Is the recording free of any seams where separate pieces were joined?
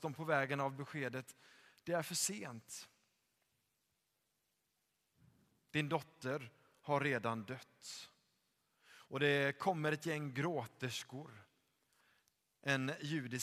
yes; 0 cuts

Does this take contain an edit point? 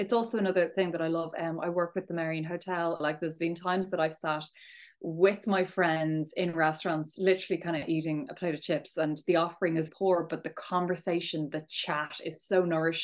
yes; 2 cuts; at 3.0 s, 9.9 s

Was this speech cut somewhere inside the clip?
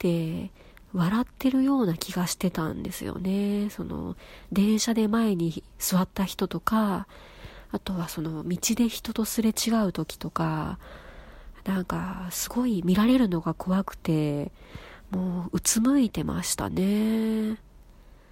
no; 0 cuts

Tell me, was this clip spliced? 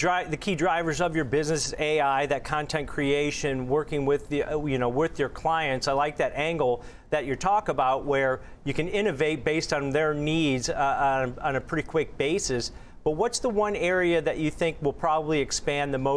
no; 0 cuts

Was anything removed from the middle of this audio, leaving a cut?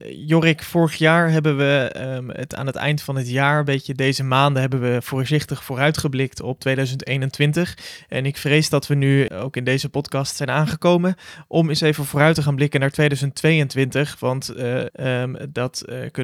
yes; 2 cuts; at 9.3 s, 14.9 s

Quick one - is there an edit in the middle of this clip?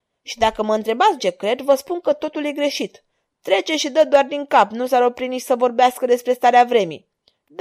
yes; 2 cuts; at 1.2 s, 3.3 s

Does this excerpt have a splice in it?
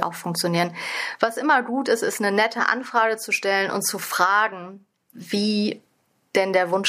no; 0 cuts

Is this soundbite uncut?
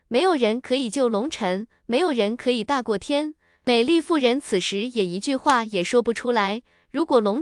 no; 1 cut; at 3.5 s

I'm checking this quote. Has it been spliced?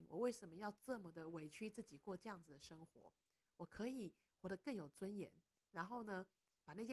no; 0 cuts

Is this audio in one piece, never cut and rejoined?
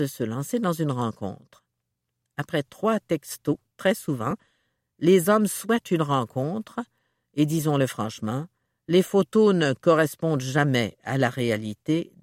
yes; 0 cuts

